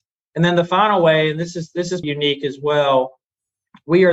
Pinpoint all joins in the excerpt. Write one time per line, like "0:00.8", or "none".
0:02.0

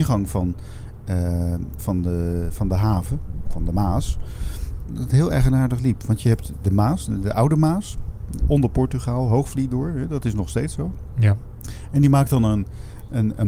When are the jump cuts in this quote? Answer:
0:01.8
0:04.8

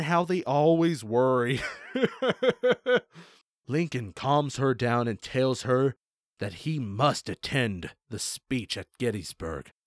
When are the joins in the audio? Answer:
none

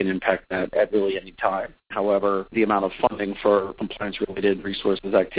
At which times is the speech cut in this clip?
0:01.9

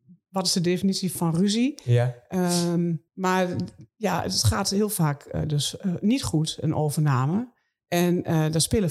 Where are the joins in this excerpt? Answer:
0:01.2
0:03.1

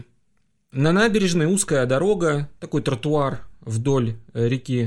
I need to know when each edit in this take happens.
none

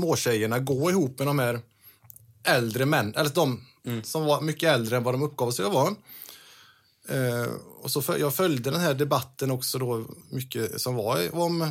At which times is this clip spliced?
0:10.2

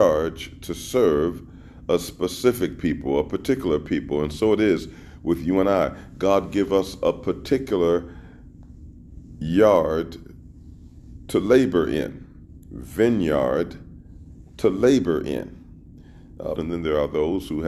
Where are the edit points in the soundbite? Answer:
0:16.6

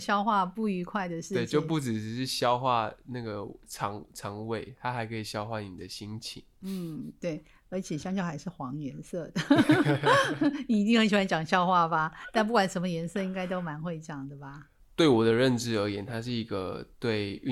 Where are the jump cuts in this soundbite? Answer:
0:14.8

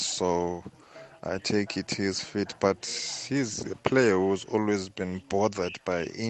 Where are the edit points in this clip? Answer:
none

